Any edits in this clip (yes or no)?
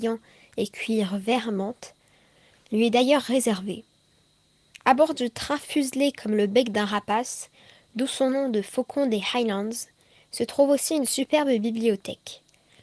no